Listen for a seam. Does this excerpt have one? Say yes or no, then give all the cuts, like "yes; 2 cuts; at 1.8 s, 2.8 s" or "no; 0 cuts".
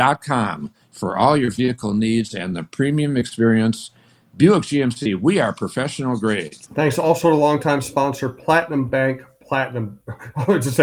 no; 0 cuts